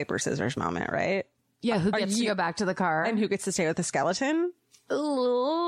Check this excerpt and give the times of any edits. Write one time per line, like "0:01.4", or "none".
none